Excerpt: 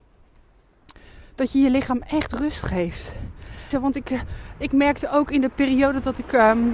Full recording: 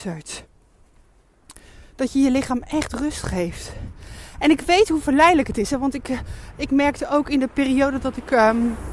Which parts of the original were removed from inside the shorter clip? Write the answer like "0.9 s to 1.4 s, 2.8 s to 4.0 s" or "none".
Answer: 4.3 s to 5.7 s